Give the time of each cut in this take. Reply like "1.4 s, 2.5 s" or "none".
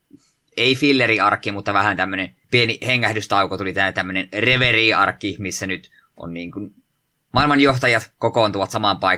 2.4 s